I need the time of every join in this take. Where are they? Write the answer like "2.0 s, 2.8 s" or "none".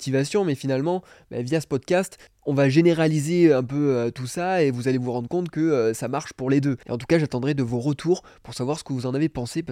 6.8 s